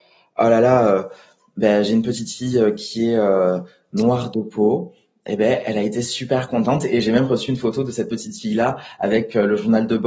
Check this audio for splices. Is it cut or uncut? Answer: uncut